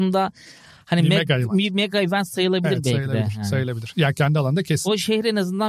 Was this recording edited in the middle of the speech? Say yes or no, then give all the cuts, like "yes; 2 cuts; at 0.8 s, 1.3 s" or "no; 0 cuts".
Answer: no; 0 cuts